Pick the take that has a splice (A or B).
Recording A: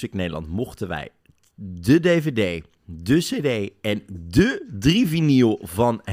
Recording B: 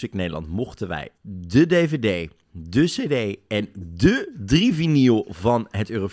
B